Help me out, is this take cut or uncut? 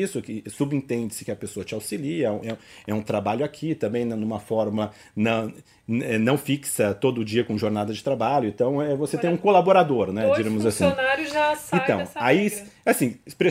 uncut